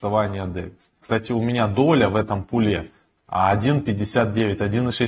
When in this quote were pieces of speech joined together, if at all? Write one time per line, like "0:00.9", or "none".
0:01.0
0:03.2